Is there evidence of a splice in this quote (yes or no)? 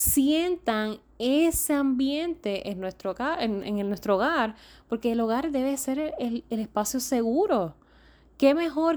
no